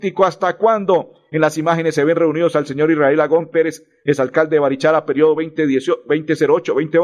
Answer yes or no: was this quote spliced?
no